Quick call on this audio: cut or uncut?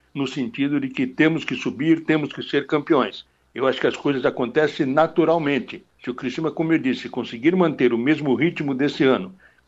cut